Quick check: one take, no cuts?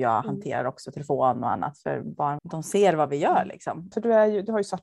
no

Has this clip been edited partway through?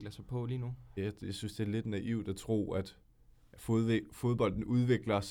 yes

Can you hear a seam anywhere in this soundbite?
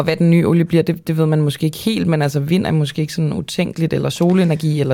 no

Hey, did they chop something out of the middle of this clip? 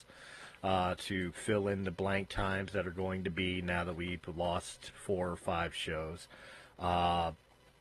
no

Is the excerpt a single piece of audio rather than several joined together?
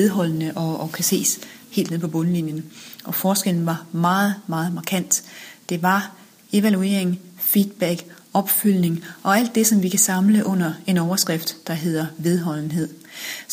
yes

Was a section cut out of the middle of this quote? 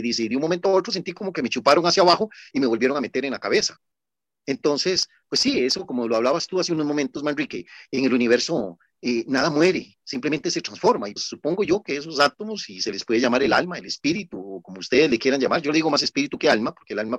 yes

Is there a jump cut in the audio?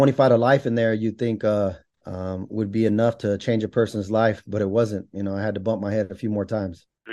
no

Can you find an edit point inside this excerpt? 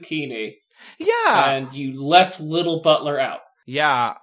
no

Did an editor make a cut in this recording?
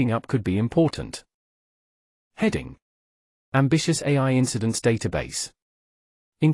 no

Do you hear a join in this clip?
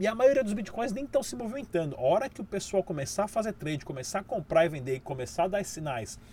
no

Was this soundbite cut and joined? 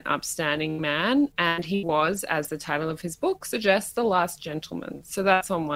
no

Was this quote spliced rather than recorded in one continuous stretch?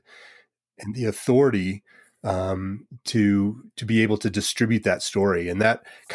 no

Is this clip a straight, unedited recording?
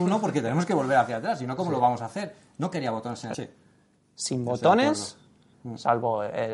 no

